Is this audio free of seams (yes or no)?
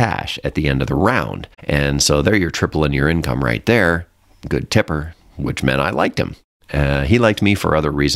no